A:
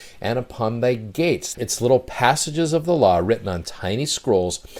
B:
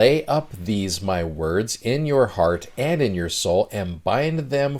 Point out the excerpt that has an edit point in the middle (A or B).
A